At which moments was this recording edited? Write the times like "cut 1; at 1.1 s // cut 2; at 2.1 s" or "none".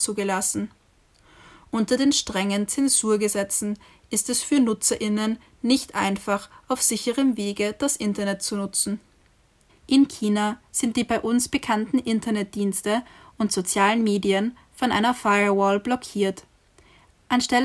cut 1; at 9.7 s